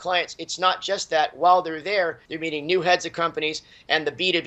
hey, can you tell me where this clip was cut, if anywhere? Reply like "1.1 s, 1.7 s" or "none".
2.3 s